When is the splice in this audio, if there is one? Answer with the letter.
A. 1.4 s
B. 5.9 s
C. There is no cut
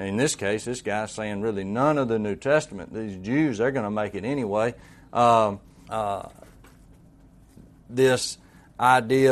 B